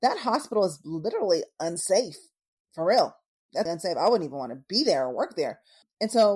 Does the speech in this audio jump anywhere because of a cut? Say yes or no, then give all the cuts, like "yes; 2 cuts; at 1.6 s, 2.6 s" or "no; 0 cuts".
yes; 1 cut; at 3.7 s